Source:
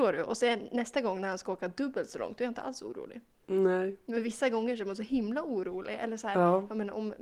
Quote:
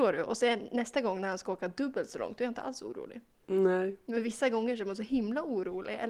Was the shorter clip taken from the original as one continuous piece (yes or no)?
yes